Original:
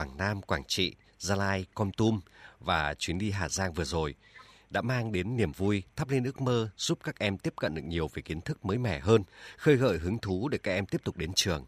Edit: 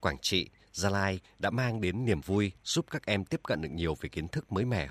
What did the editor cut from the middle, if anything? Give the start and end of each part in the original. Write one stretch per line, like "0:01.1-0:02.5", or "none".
0:01.7-0:04.5
0:05.9-0:06.7